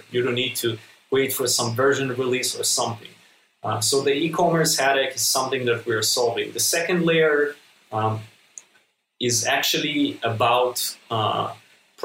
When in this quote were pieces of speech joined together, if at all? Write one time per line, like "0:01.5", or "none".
none